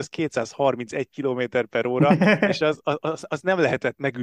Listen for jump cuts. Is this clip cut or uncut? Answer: uncut